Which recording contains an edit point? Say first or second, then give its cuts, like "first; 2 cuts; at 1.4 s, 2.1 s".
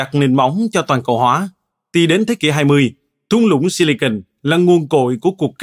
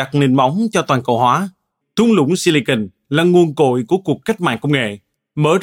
second; 1 cut; at 1.8 s